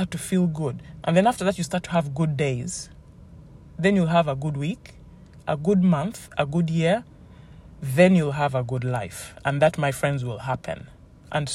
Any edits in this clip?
yes; 1 cut; at 1.0 s

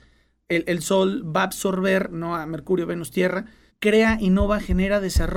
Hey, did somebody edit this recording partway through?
yes; 1 cut; at 3.7 s

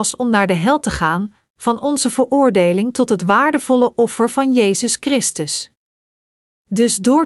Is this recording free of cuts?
yes; 0 cuts

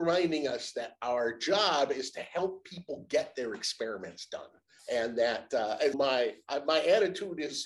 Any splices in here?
yes; 2 cuts; at 4.8 s, 5.9 s

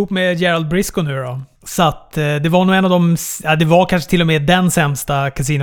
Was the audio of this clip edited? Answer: yes; 1 cut; at 1.5 s

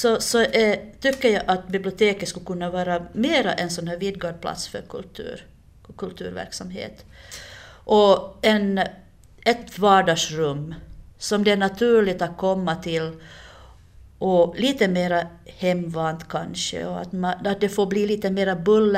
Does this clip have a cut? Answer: no; 0 cuts

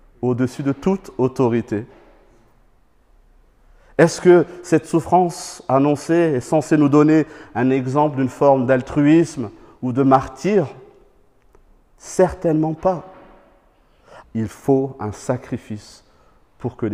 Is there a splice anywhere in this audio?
yes; 1 cut; at 14.2 s

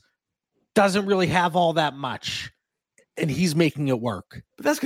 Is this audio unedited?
yes; 0 cuts

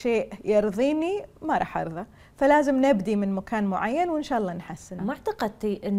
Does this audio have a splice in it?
yes; 1 cut; at 5.0 s

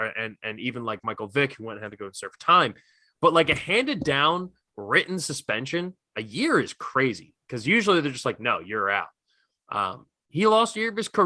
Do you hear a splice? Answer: yes; 1 cut; at 10.3 s

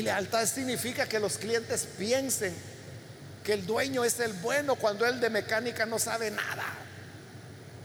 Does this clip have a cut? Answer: no; 0 cuts

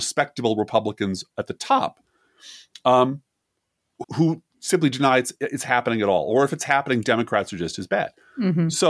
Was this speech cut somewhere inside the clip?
yes; 1 cut; at 4.0 s

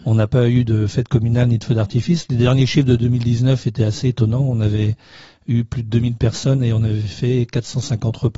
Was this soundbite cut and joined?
no; 0 cuts

